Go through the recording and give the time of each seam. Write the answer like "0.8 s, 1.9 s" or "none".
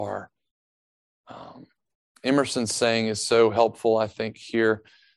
none